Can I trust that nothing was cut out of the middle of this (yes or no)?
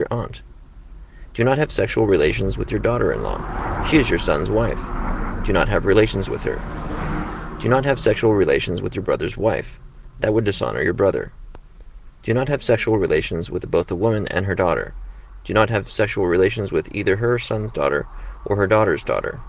yes